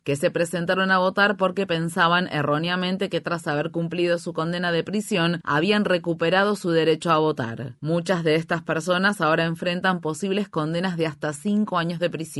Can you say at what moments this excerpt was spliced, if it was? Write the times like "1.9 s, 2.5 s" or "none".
none